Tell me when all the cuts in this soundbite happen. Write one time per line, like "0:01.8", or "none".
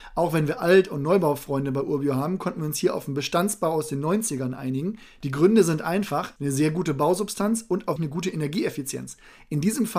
0:06.4
0:08.0